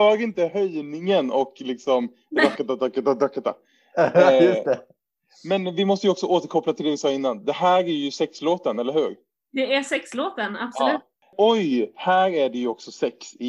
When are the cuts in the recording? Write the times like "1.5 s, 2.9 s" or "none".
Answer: none